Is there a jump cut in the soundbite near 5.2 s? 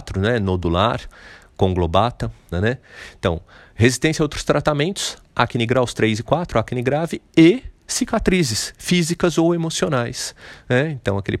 no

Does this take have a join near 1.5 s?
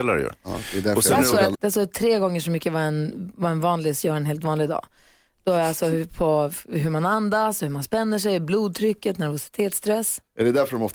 yes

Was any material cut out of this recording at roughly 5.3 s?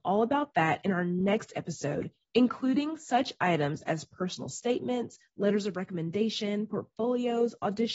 yes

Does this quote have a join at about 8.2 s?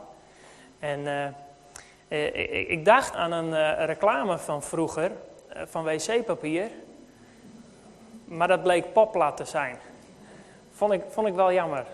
no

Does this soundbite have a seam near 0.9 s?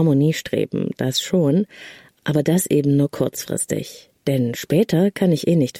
no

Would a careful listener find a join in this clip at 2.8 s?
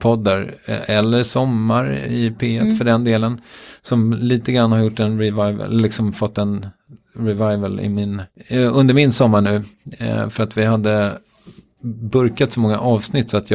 no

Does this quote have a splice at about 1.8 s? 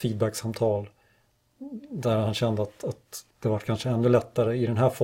no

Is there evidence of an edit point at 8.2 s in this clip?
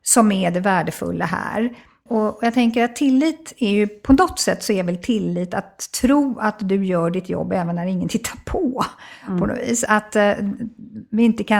no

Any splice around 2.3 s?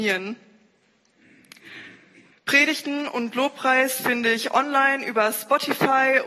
yes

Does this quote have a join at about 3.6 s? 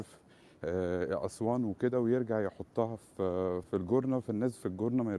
yes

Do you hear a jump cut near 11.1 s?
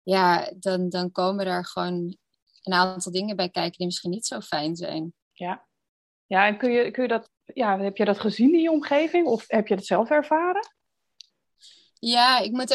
no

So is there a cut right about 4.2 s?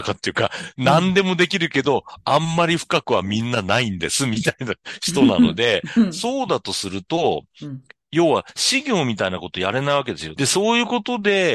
no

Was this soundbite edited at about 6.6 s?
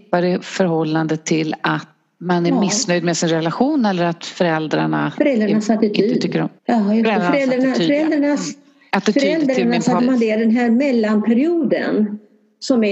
yes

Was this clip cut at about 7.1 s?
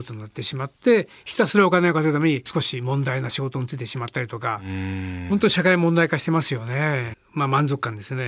yes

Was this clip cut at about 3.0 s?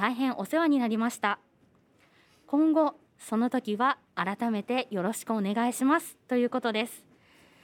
yes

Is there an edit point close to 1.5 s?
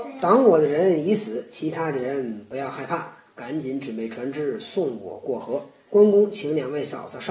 no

